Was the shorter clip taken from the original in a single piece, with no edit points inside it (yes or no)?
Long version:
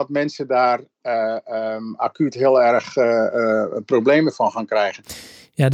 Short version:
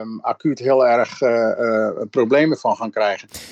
yes